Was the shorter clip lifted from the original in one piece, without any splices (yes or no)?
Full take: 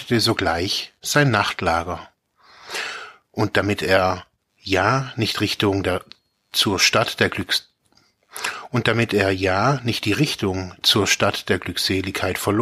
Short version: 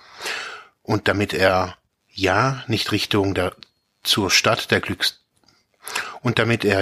yes